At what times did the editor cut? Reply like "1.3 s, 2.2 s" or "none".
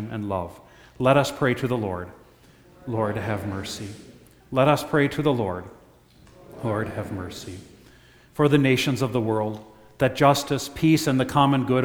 4.4 s